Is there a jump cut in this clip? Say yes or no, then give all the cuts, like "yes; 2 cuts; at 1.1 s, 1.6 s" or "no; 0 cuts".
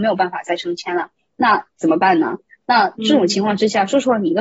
yes; 1 cut; at 2.6 s